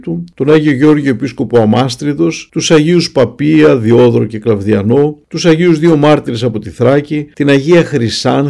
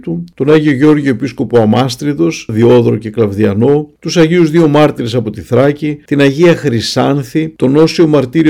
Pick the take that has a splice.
second; 1 cut; at 2.5 s

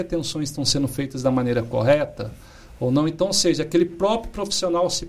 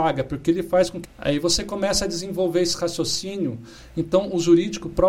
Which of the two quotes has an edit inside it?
second; 1 cut; at 1.0 s

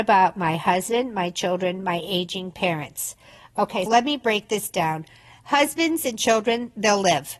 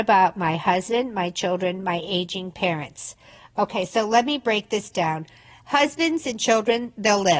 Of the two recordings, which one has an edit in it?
first; 1 cut; at 3.9 s

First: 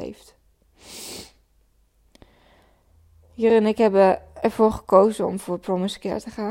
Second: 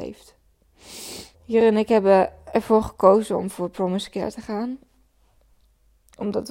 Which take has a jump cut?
second; 1 cut; at 1.3 s

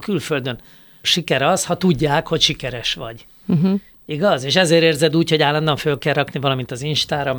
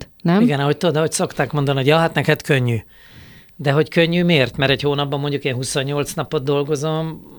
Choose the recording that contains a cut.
first; 1 cut; at 1.0 s

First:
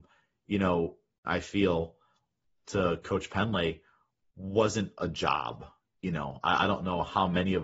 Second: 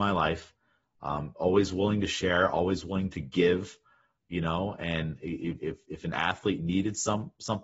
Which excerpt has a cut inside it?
first; 1 cut; at 1.2 s

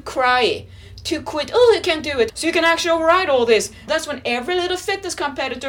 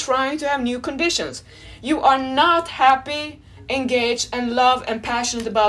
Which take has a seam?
first; 2 cuts; at 2.3 s, 3.9 s

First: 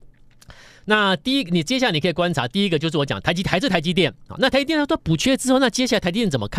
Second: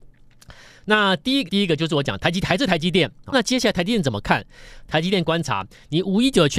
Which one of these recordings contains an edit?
second; 2 cuts; at 1.5 s, 3.3 s

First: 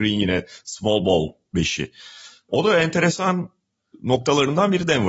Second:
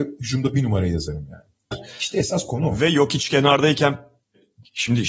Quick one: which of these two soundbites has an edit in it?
second; 1 cut; at 1.7 s

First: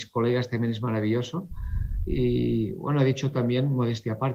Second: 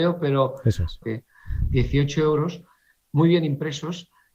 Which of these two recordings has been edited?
second; 1 cut; at 1.0 s

